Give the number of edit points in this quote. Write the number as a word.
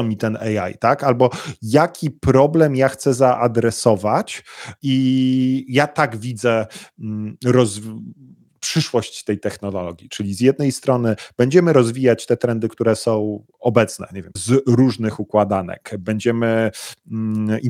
one